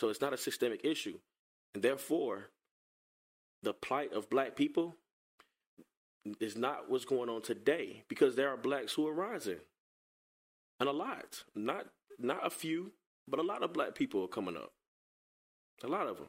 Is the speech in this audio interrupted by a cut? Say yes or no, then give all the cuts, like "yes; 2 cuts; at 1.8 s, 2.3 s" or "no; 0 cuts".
no; 0 cuts